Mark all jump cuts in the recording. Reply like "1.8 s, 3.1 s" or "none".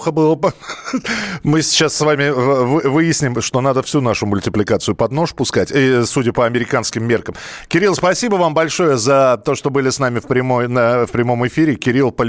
none